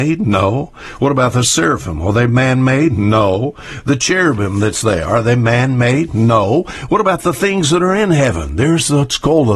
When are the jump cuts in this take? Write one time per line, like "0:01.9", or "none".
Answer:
none